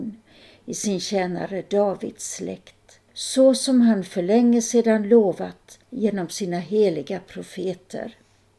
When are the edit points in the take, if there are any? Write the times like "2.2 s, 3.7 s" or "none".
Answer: 3.1 s, 5.8 s